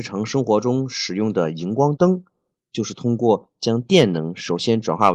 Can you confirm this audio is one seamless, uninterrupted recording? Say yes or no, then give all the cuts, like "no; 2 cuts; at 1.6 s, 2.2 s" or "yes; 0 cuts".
yes; 0 cuts